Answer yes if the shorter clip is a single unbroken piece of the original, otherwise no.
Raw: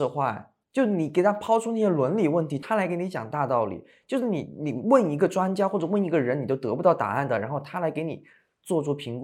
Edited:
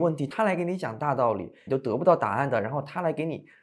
no